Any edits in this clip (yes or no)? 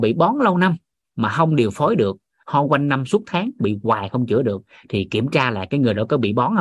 no